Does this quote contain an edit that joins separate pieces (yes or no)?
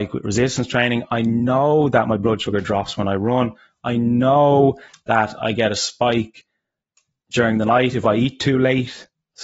no